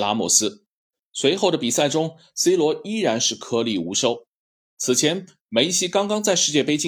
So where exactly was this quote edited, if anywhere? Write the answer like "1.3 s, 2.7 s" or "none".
none